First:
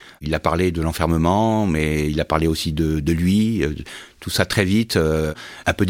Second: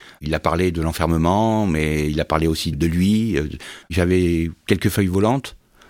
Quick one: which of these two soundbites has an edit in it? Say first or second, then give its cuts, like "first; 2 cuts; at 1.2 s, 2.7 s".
second; 2 cuts; at 2.7 s, 3.8 s